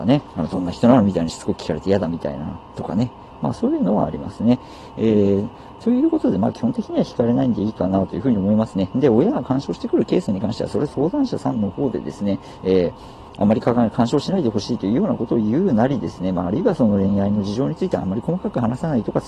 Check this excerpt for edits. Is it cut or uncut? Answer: cut